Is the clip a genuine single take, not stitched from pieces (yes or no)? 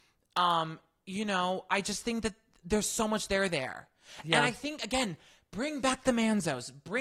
yes